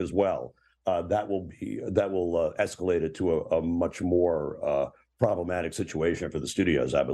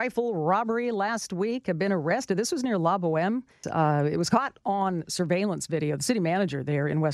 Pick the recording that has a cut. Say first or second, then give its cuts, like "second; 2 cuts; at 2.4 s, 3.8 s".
second; 1 cut; at 3.6 s